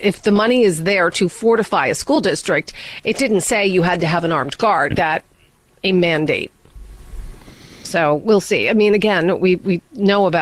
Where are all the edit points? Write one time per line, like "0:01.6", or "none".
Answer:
0:04.9